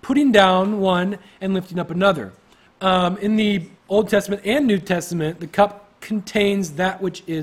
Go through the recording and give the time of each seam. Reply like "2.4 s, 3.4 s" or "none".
2.7 s, 3.8 s